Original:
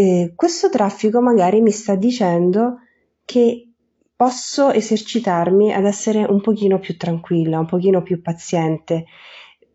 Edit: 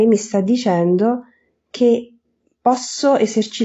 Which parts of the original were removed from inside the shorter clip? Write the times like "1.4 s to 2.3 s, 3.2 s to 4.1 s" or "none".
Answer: none